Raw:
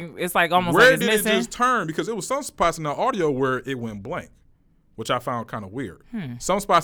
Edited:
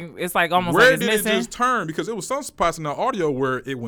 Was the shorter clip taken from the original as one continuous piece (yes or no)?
yes